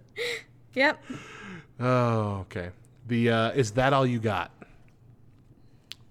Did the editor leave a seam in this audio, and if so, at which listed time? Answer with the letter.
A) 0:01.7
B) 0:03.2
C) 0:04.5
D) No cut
D